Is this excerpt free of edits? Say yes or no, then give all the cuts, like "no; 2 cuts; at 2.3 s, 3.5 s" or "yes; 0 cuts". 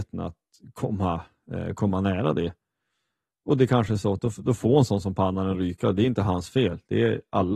yes; 0 cuts